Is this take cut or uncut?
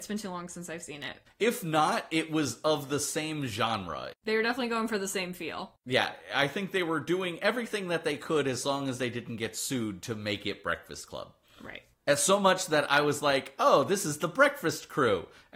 uncut